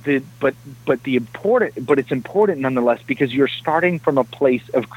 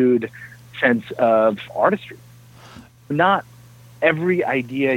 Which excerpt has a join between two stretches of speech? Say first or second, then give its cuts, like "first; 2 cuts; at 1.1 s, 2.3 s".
second; 1 cut; at 3.1 s